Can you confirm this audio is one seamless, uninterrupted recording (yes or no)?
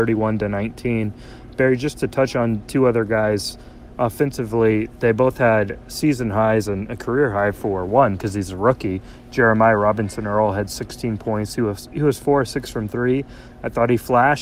yes